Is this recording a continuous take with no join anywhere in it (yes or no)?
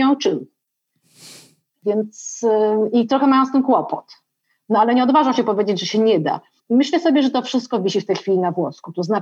yes